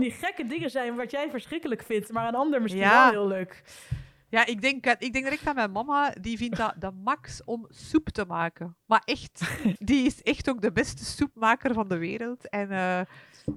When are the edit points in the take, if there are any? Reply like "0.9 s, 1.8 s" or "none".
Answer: 9.8 s

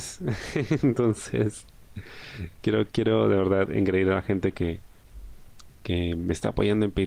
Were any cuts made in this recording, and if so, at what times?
none

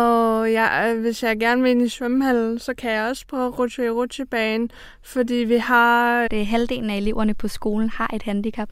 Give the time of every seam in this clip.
6.3 s

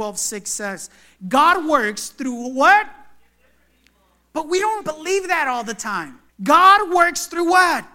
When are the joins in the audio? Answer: 4.8 s, 6.3 s

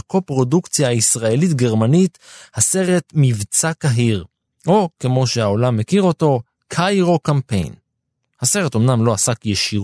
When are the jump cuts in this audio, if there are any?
none

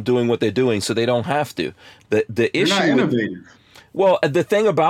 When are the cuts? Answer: none

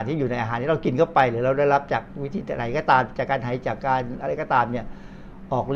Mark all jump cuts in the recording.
3.6 s

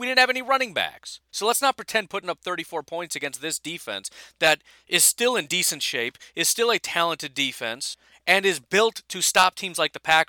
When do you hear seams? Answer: 1.3 s

